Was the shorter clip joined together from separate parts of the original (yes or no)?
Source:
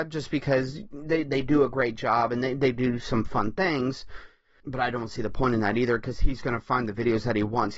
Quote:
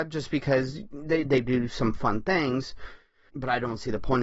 yes